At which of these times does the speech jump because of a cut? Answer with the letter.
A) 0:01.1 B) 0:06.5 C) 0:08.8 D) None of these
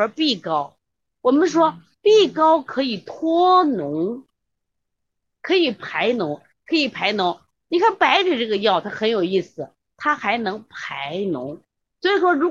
B